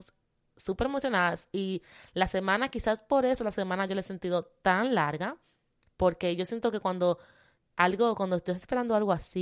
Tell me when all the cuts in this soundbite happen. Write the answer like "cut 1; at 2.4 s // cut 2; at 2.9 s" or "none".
none